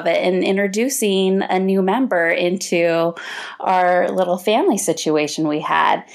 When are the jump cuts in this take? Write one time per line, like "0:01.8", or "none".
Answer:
none